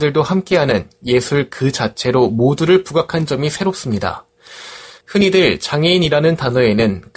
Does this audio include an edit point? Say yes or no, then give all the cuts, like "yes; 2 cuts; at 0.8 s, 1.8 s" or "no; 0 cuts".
yes; 1 cut; at 5.0 s